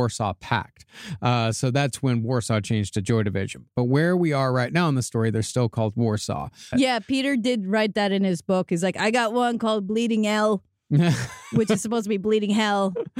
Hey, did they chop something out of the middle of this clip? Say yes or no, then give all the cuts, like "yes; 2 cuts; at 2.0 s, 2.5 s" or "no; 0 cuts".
yes; 1 cut; at 6.7 s